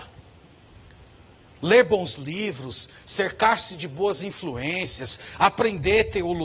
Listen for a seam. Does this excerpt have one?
yes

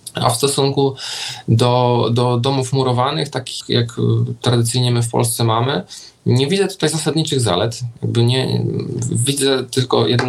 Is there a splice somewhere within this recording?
yes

